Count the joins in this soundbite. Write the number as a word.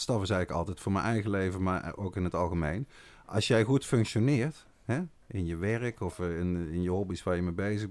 zero